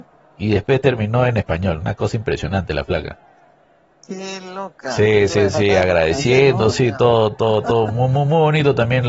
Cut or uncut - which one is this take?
uncut